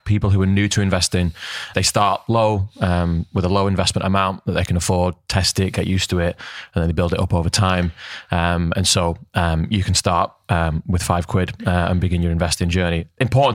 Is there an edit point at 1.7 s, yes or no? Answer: yes